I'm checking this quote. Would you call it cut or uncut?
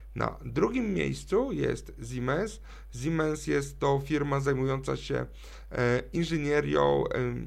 uncut